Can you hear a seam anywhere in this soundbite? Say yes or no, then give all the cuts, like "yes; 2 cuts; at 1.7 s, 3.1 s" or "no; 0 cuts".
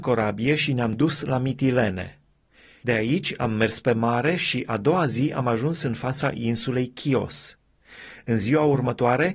no; 0 cuts